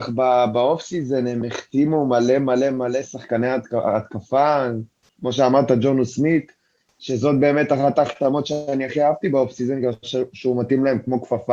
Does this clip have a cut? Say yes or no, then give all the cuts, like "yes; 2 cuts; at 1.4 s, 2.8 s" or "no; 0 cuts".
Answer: no; 0 cuts